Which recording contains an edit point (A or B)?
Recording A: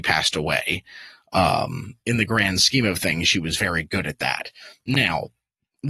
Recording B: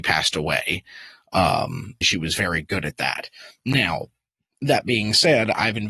B